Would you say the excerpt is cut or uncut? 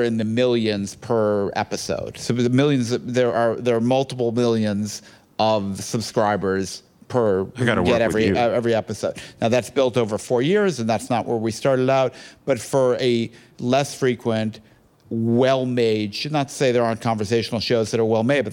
uncut